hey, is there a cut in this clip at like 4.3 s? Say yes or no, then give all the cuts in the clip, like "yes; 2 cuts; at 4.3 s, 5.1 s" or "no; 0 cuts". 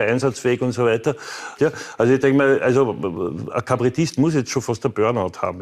no; 1 cut; at 1.6 s